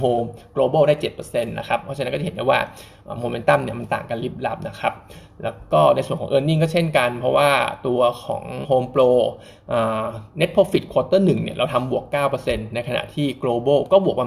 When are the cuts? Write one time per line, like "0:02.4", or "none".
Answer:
0:08.6